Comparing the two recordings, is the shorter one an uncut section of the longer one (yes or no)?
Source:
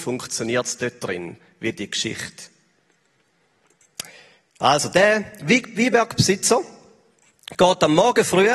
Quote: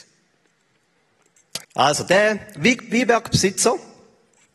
no